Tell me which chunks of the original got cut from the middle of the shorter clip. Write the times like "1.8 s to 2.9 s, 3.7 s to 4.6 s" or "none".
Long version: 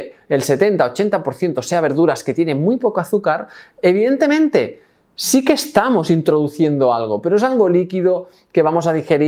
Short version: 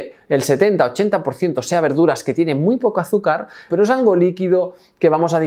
3.7 s to 7.2 s